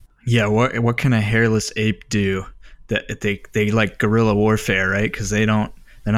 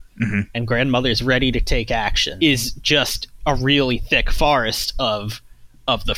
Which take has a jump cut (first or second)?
second